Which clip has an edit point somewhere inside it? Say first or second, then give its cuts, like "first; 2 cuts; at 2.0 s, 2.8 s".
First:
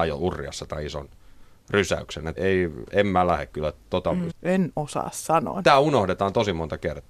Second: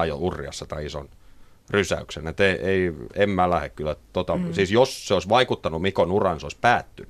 first; 3 cuts; at 2.4 s, 4.3 s, 5.6 s